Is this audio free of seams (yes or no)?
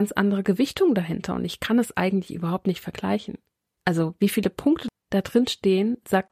yes